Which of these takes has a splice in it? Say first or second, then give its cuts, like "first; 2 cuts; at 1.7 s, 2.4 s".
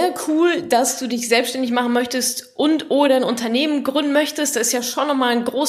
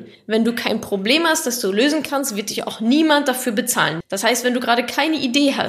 second; 1 cut; at 4.0 s